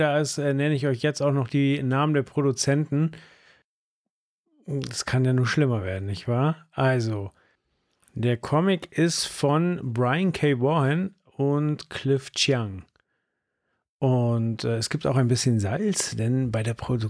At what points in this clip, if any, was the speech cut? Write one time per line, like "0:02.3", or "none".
none